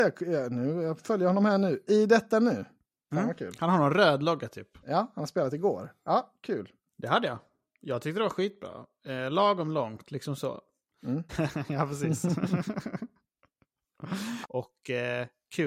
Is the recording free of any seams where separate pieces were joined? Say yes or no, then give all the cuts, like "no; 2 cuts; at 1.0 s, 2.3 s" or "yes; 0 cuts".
no; 3 cuts; at 6.9 s, 11.3 s, 14.4 s